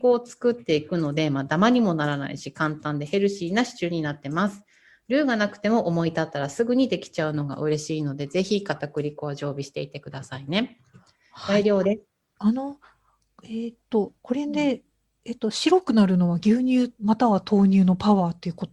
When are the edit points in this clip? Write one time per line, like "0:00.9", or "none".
0:12.4
0:14.2